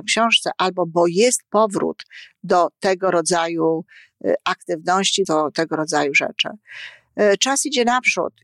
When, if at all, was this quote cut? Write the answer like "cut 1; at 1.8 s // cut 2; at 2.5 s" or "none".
cut 1; at 5.2 s